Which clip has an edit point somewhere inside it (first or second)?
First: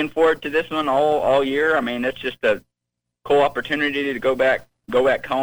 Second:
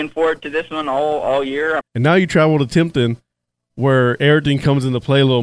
second